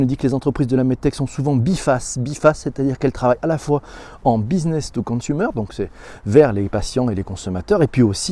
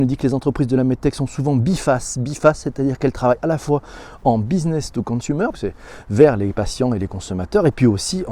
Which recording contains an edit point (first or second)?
second